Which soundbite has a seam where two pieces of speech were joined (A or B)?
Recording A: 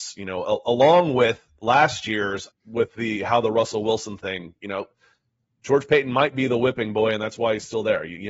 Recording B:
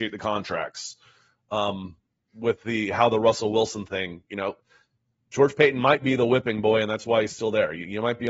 A